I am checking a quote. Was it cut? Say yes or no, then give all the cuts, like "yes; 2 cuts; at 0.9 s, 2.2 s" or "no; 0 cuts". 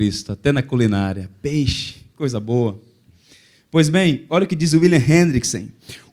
no; 0 cuts